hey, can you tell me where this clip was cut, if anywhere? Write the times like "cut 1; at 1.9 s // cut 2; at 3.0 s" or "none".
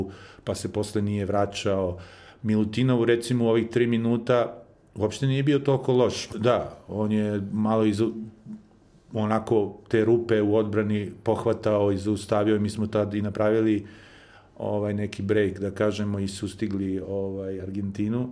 cut 1; at 6.3 s